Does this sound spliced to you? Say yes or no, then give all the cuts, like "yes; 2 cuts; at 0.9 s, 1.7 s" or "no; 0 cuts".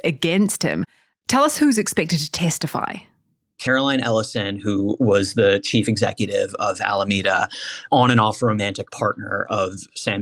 no; 0 cuts